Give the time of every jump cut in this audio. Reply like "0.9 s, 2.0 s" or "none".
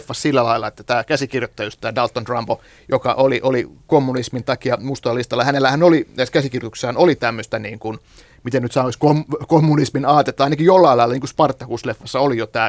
none